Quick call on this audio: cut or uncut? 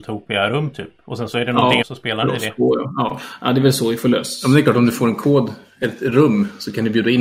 cut